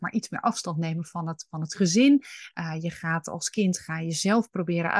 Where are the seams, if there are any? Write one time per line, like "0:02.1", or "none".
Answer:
none